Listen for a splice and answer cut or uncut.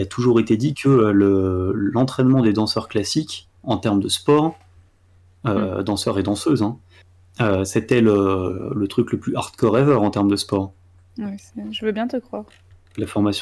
uncut